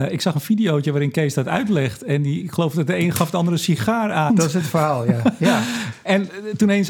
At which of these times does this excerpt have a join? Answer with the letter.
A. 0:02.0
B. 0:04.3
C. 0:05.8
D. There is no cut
B